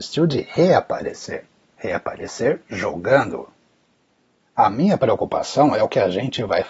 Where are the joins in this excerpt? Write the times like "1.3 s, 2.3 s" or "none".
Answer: 4.4 s